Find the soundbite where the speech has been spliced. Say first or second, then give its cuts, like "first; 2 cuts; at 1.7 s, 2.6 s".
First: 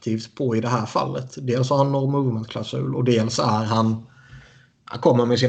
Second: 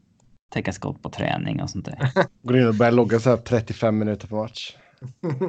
second; 1 cut; at 2.3 s